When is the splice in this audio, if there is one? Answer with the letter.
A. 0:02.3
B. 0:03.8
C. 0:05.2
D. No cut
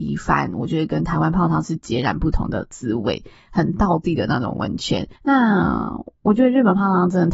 C